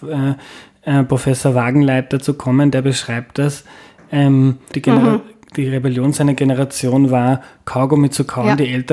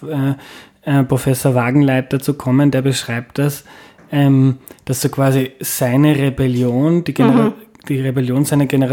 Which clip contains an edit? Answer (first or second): first